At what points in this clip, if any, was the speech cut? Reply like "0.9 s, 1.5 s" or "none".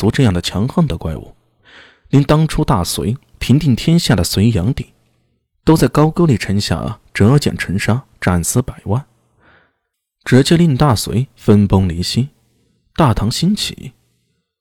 none